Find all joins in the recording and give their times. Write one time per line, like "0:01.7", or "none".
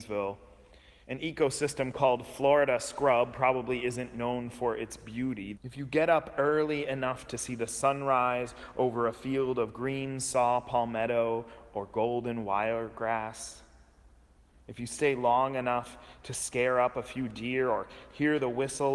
0:01.0
0:05.5

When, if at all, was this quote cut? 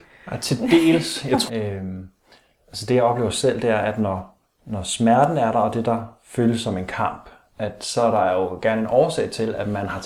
0:01.5

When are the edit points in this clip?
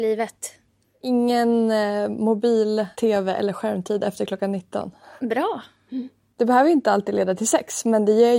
0:02.9
0:05.2

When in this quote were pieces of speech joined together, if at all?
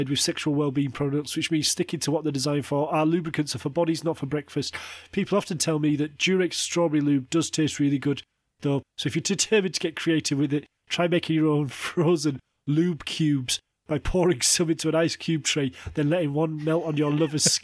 0:08.8

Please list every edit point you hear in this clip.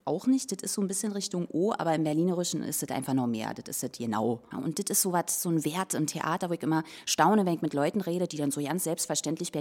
0:04.5

